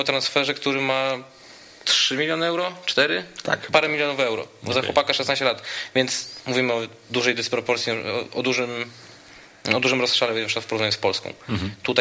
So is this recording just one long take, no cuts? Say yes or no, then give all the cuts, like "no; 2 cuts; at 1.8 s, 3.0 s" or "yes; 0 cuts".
yes; 0 cuts